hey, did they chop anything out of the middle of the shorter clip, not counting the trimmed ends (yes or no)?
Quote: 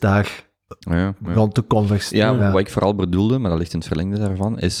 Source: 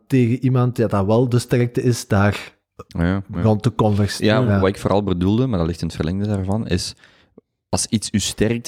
no